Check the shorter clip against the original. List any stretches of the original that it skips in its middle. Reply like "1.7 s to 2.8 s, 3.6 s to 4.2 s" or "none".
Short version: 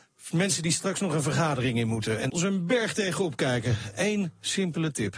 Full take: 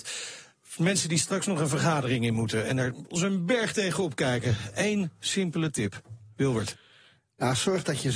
2.8 s to 3.1 s